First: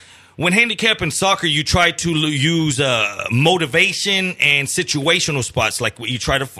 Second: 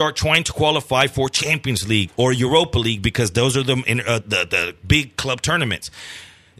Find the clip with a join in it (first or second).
second